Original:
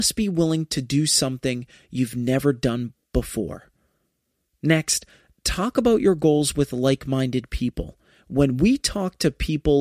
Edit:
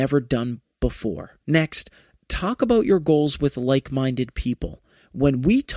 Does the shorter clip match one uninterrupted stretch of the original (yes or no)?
no